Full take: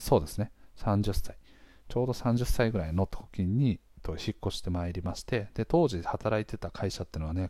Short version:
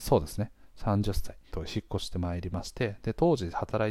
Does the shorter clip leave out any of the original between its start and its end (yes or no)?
yes